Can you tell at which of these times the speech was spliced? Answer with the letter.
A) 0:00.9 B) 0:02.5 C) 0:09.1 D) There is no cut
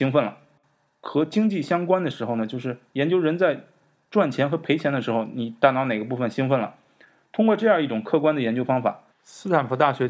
C